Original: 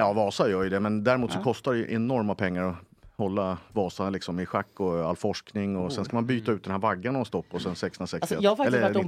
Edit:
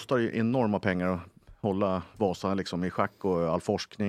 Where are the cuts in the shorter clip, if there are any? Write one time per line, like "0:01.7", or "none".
none